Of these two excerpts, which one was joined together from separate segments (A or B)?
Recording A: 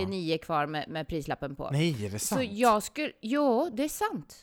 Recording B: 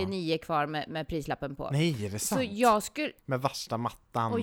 B